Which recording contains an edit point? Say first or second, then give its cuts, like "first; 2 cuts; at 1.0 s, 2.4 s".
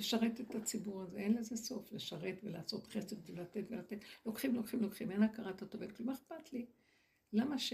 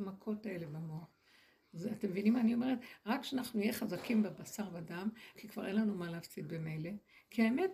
second; 1 cut; at 5.3 s